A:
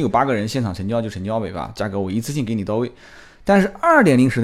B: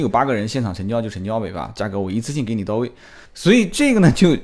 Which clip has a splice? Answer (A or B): B